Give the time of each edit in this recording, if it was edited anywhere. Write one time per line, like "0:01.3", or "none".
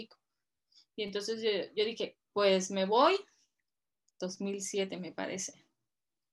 0:04.1